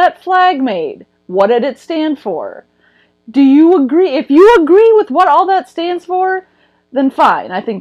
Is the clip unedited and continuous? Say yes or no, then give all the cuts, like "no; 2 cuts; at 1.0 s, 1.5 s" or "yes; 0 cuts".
yes; 0 cuts